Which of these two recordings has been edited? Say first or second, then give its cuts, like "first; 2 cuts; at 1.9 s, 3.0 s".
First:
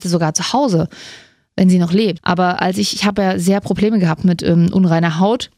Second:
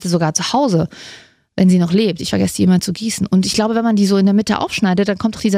first; 1 cut; at 2.2 s